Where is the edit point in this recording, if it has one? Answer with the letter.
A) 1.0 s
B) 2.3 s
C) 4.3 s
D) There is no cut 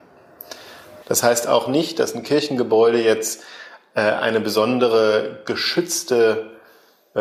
A